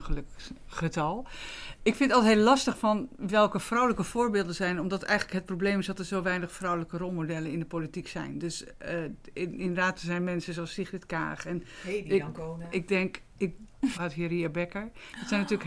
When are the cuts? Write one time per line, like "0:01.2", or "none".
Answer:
0:12.7
0:13.9